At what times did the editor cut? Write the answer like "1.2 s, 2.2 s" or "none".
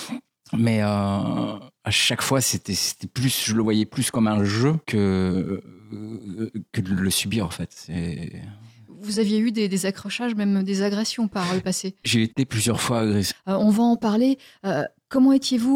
4.8 s, 13.3 s